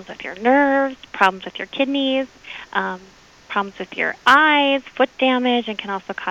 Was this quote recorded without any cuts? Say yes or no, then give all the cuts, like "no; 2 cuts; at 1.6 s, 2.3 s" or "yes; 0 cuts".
yes; 0 cuts